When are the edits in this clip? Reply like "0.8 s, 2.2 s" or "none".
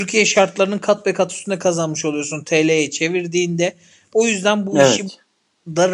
none